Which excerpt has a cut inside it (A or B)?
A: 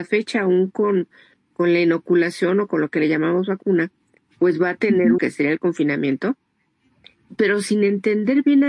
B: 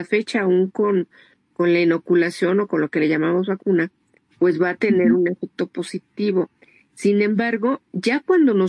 A